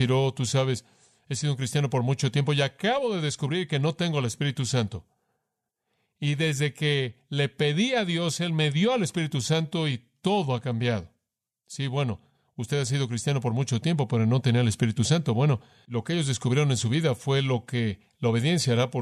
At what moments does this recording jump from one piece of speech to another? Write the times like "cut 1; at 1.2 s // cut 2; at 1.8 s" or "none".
none